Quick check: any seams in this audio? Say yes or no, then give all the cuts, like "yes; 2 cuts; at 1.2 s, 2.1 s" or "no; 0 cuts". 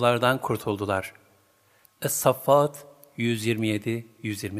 yes; 1 cut; at 1.8 s